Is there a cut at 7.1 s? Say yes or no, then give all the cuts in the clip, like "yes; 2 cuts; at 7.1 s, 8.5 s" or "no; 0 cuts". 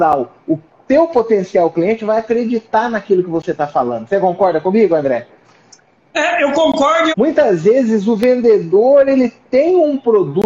yes; 1 cut; at 7.1 s